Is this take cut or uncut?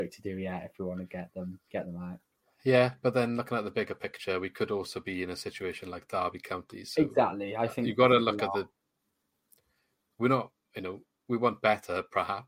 uncut